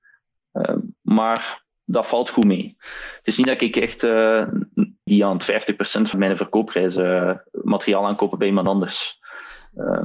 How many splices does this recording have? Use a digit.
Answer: 2